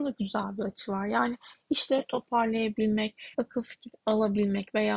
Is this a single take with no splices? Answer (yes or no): no